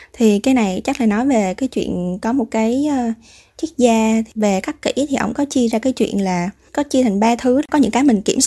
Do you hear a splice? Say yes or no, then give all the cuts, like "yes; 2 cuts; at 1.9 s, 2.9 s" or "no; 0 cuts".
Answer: no; 0 cuts